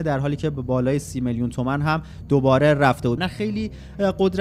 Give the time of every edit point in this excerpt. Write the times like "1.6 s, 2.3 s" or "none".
3.2 s